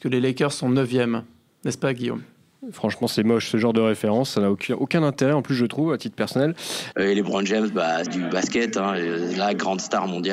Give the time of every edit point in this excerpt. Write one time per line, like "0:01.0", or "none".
0:06.9
0:08.1